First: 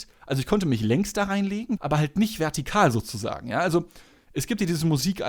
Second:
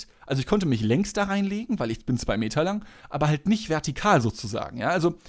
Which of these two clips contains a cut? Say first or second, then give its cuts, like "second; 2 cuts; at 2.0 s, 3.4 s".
first; 1 cut; at 1.8 s